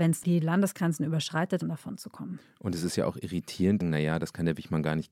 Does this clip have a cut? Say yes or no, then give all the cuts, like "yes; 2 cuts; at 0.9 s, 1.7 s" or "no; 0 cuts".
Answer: yes; 2 cuts; at 1.6 s, 3.8 s